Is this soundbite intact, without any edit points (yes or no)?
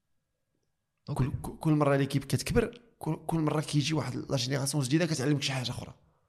yes